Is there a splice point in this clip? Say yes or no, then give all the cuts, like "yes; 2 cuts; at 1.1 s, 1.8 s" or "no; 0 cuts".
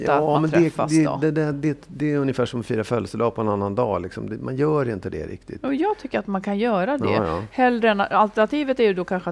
no; 0 cuts